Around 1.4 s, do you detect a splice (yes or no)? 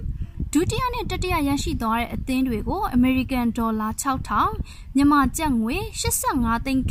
no